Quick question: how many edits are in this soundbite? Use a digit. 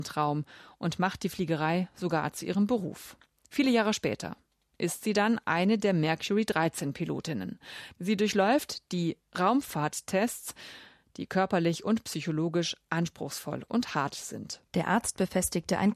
0